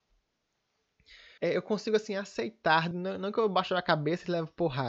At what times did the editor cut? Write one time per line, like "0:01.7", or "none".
0:01.4
0:02.9